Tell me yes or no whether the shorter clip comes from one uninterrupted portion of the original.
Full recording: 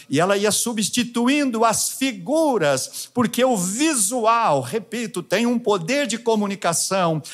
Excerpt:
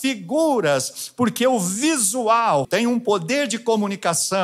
no